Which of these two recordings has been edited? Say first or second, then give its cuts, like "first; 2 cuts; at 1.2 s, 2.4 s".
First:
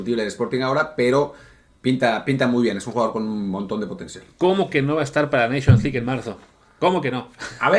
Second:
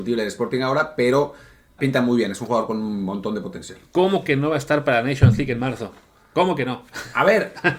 second; 1 cut; at 1.8 s